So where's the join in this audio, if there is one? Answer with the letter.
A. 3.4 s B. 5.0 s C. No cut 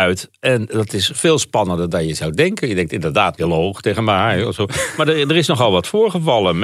A